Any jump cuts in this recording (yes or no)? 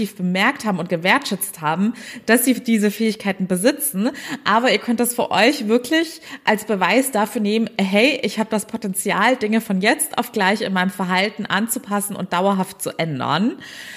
no